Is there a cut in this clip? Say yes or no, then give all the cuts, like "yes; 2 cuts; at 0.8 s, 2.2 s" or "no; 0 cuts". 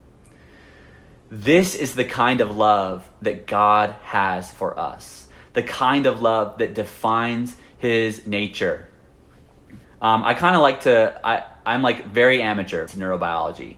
yes; 2 cuts; at 9.8 s, 12.9 s